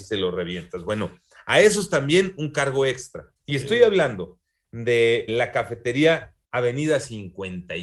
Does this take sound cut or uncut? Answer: cut